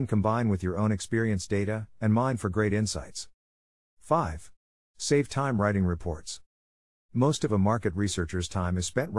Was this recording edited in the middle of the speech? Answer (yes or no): yes